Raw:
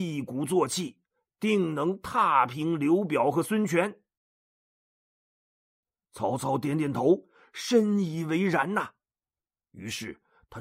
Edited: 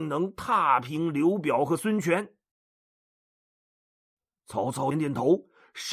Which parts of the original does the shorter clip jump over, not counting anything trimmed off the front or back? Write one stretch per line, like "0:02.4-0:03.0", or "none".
0:06.6-0:06.7